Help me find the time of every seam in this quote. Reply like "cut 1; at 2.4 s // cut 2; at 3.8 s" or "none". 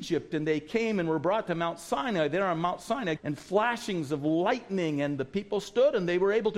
cut 1; at 3.2 s